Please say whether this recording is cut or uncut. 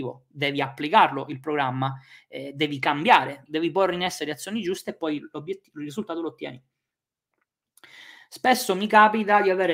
cut